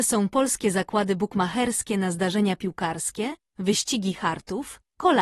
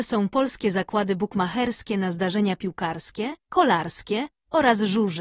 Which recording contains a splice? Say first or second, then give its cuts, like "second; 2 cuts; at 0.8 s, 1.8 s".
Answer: second; 1 cut; at 3.4 s